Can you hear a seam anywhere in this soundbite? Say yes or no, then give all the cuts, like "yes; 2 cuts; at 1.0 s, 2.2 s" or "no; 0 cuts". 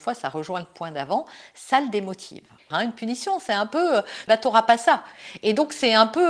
yes; 2 cuts; at 2.7 s, 4.3 s